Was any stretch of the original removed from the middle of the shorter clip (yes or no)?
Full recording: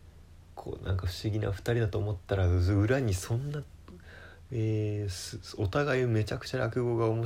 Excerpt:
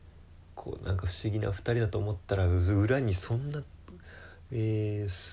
no